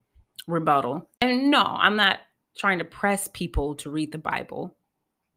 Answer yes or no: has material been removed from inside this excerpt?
no